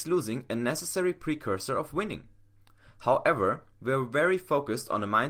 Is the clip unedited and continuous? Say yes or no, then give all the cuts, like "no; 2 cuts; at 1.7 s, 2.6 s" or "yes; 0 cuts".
no; 1 cut; at 3.7 s